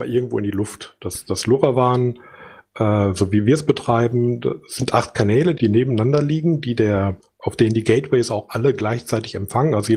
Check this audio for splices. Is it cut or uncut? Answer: cut